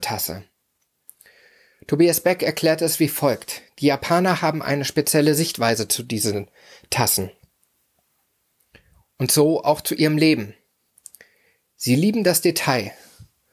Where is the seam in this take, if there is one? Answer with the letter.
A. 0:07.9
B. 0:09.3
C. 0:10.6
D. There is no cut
D